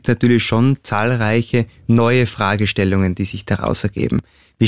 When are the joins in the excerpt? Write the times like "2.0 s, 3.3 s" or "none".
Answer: none